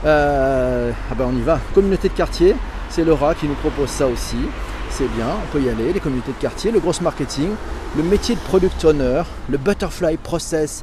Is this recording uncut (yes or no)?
no